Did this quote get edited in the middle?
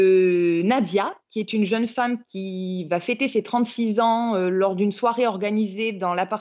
no; 0 cuts

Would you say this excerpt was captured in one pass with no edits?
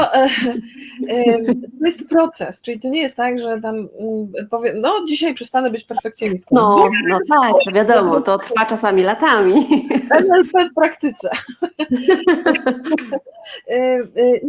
yes; 0 cuts

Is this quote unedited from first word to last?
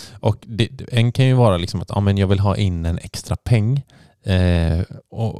yes; 0 cuts

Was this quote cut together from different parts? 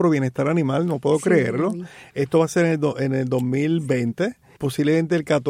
yes; 1 cut; at 4.6 s

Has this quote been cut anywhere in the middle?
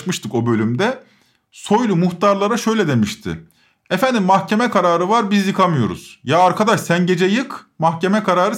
no; 0 cuts

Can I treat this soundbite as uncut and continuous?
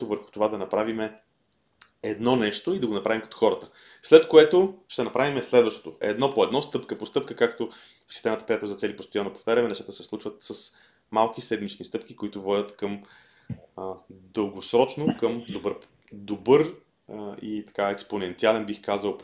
no; 1 cut; at 6.0 s

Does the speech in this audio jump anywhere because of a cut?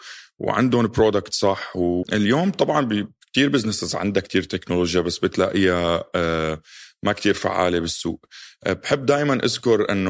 yes; 1 cut; at 2.0 s

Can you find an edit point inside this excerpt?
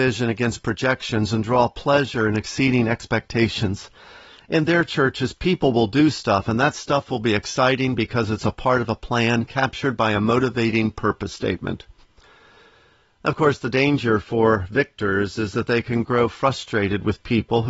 no; 0 cuts

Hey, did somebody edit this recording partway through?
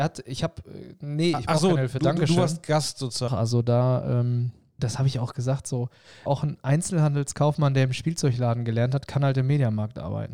yes; 3 cuts; at 3.3 s, 4.8 s, 6.3 s

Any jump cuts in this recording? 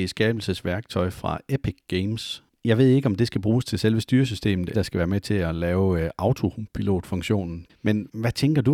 yes; 3 cuts; at 2.5 s, 4.7 s, 7.7 s

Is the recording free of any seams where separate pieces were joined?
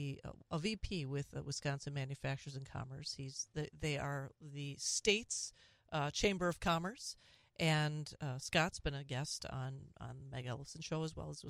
yes; 0 cuts

